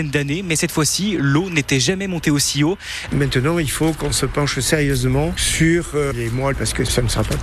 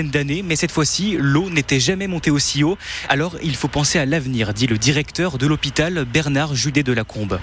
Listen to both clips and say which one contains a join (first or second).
first